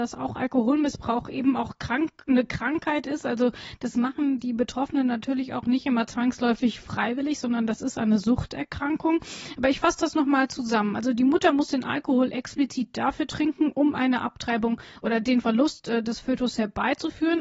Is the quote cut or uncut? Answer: uncut